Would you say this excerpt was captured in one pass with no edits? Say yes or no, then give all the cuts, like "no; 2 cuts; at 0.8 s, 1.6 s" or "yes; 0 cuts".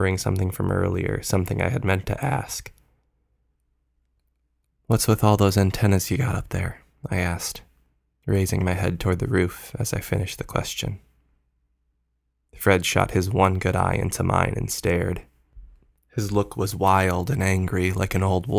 yes; 0 cuts